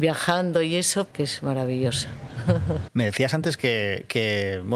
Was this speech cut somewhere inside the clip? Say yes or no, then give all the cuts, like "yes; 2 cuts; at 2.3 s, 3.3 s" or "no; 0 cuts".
yes; 2 cuts; at 1.1 s, 2.9 s